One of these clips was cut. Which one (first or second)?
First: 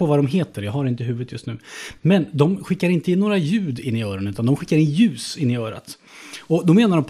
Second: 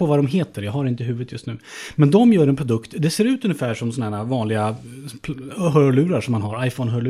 first